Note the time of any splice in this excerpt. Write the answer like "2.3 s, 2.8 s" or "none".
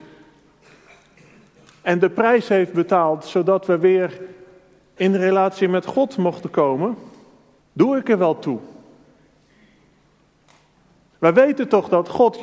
7.6 s, 11.1 s